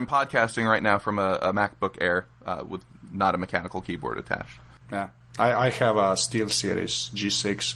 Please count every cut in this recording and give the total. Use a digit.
1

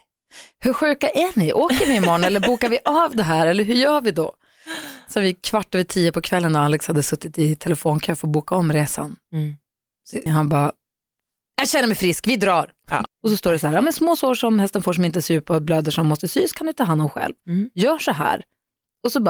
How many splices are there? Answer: 2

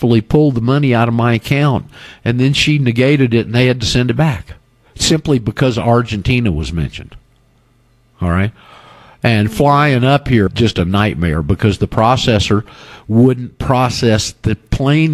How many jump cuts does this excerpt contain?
1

